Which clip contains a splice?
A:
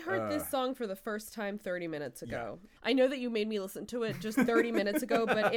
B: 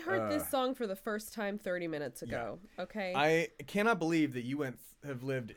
A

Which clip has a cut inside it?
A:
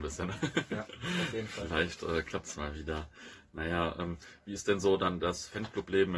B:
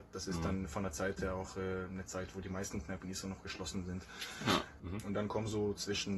B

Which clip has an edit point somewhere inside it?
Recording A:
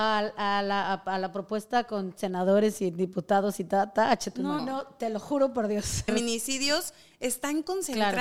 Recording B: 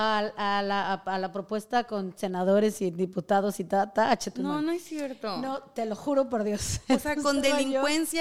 A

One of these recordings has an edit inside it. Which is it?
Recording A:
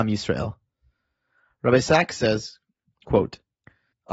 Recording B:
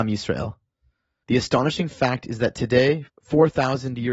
B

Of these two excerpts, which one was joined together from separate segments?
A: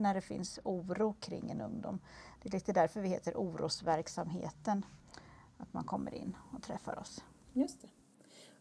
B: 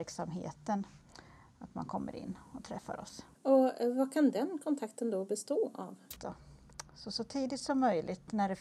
B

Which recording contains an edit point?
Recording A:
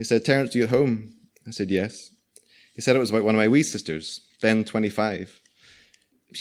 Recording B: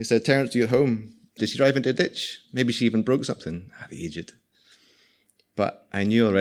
B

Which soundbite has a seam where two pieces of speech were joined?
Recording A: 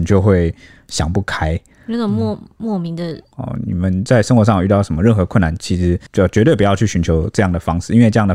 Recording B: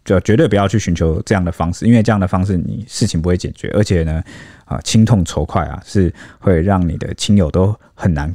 A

